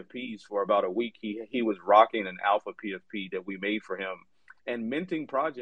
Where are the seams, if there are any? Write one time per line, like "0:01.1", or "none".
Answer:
0:04.6